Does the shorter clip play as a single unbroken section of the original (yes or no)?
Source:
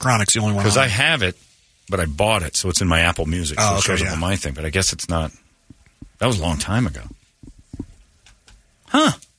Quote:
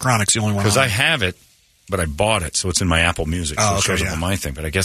yes